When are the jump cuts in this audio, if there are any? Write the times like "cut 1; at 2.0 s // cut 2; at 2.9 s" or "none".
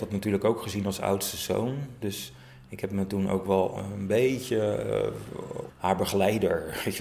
cut 1; at 5.7 s